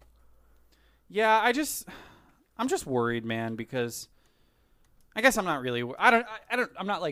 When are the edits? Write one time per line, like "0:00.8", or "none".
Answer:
none

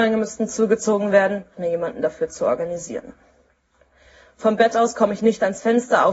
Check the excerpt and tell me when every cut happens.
0:01.5

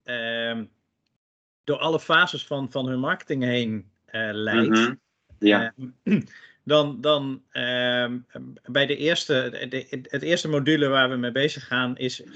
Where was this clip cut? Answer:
none

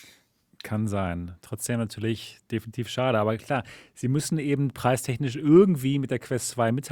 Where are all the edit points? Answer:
none

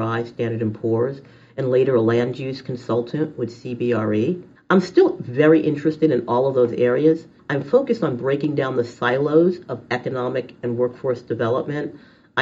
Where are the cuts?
0:04.6
0:07.4

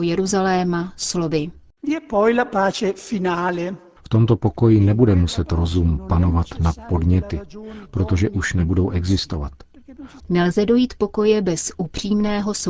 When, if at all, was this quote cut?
0:04.0
0:10.2

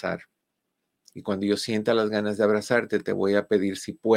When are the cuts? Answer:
0:01.1

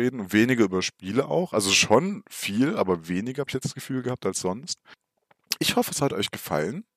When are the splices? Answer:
none

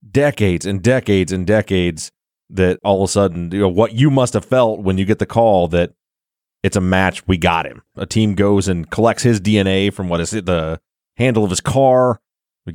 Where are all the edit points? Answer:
0:07.9

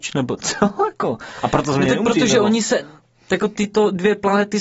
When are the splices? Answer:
none

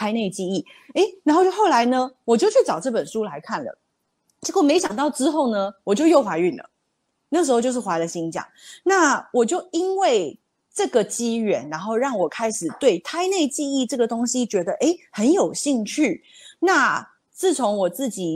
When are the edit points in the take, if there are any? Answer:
none

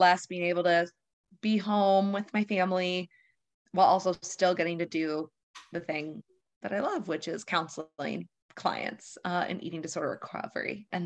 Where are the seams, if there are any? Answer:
none

